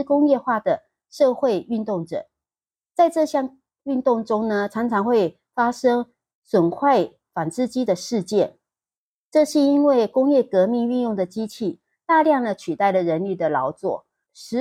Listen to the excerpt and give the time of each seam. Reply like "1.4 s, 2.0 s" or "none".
none